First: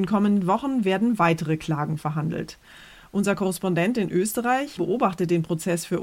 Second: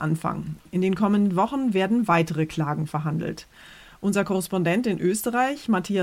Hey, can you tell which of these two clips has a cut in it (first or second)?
first